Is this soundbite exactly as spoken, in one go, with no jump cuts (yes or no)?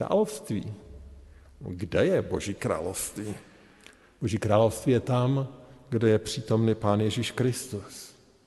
yes